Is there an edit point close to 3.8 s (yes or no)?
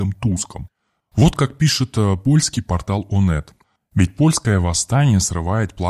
yes